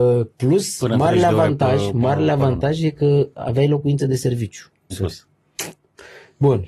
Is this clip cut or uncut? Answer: cut